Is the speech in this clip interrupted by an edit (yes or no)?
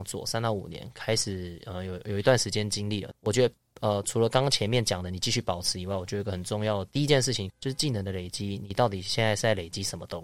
yes